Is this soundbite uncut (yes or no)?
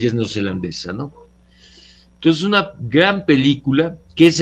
yes